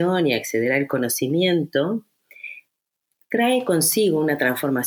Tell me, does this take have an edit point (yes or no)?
no